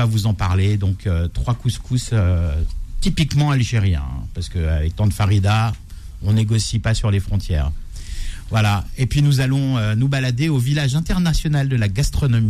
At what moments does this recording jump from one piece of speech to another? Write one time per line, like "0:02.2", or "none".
none